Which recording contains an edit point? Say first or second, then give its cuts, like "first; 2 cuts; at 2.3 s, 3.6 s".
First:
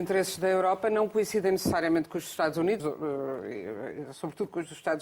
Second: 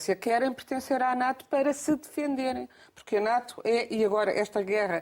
first; 1 cut; at 2.8 s